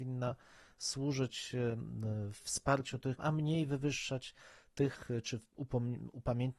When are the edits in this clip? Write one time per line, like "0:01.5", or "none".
0:03.2